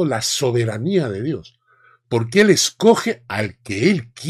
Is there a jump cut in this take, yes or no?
no